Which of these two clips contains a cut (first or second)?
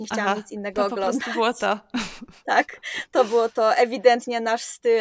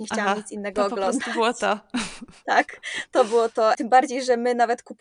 second